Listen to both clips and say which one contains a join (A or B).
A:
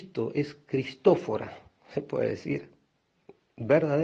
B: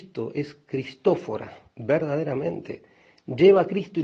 B